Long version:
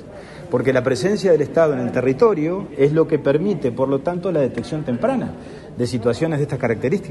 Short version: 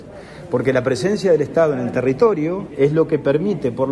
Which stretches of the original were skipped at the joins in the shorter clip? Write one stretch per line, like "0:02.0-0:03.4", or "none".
none